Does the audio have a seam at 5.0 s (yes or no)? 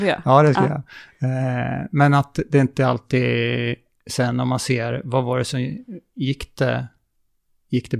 no